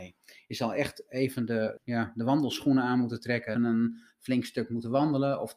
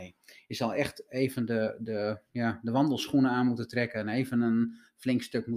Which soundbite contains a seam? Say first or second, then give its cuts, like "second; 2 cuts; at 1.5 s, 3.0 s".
first; 2 cuts; at 1.8 s, 3.6 s